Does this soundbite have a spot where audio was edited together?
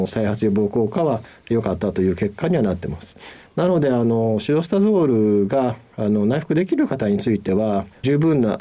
no; 0 cuts

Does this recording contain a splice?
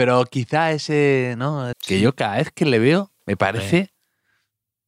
yes; 2 cuts; at 1.7 s, 3.2 s

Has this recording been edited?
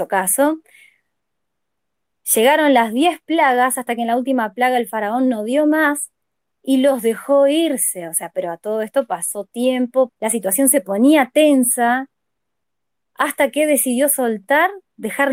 yes; 1 cut; at 10.1 s

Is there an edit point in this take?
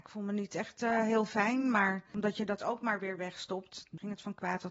no; 0 cuts

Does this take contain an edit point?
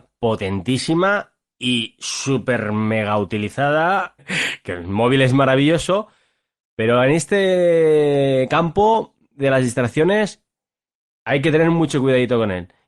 yes; 1 cut; at 4.2 s

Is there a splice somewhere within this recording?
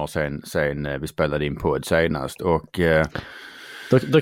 no; 0 cuts

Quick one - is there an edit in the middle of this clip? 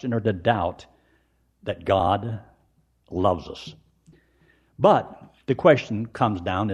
no; 0 cuts

